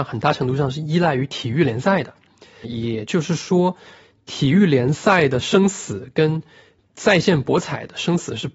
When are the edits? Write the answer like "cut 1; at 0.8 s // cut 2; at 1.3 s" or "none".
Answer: cut 1; at 2.6 s